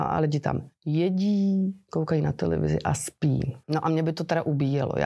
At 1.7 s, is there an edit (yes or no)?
no